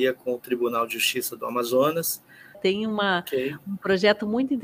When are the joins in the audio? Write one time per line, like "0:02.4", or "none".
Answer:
0:02.5